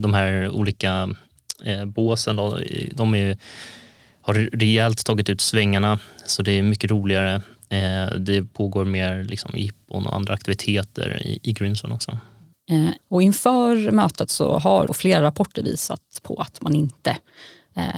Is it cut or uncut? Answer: cut